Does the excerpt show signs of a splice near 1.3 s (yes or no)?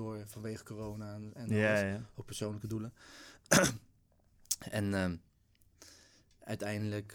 no